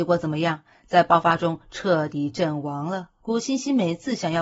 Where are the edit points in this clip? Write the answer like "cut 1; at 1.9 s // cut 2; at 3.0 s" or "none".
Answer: cut 1; at 3.2 s